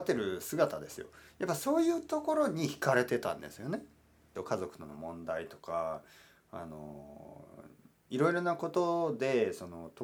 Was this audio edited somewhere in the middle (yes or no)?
yes